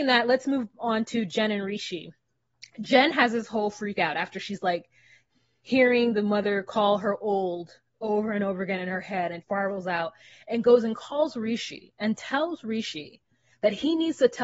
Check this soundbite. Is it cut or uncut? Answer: cut